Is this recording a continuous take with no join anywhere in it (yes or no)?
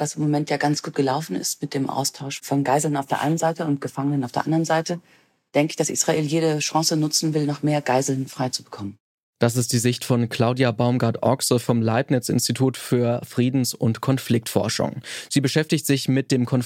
yes